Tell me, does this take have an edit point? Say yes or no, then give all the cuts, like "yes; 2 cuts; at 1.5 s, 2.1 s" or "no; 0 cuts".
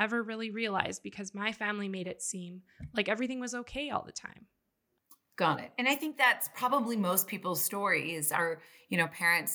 no; 0 cuts